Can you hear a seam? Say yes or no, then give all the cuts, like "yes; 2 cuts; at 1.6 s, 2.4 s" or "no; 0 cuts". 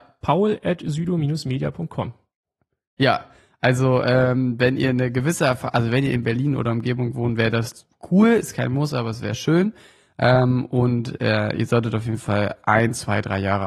no; 0 cuts